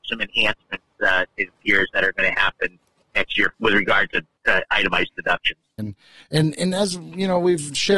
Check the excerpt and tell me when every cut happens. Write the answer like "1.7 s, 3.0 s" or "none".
5.8 s